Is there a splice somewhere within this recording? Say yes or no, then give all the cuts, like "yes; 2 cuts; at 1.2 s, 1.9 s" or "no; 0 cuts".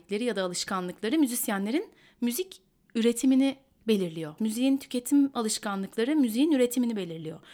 yes; 1 cut; at 4.4 s